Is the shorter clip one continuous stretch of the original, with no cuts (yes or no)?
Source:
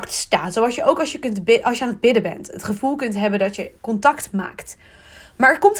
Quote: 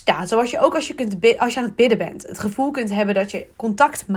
yes